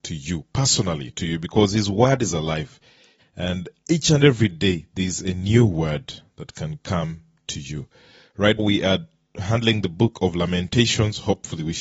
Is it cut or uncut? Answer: cut